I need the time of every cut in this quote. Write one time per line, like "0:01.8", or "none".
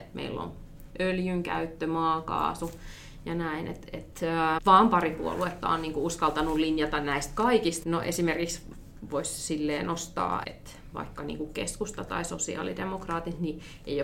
0:04.6
0:07.8
0:10.4